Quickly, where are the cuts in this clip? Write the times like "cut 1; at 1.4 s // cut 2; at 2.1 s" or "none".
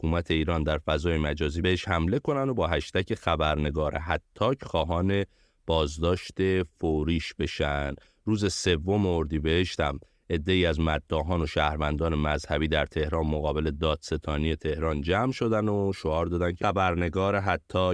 none